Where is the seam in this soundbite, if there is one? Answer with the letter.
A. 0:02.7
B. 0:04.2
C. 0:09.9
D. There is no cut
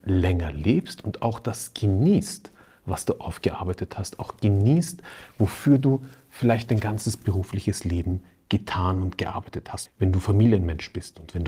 C